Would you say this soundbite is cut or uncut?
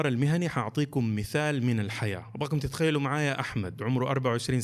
uncut